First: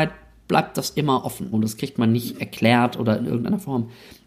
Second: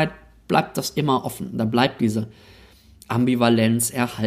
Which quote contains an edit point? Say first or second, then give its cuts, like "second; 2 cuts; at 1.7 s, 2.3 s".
first; 1 cut; at 1.5 s